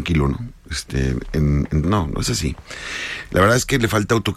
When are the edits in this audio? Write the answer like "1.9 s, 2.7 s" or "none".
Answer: 1.8 s